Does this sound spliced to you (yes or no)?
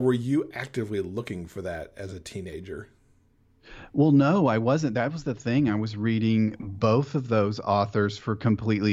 no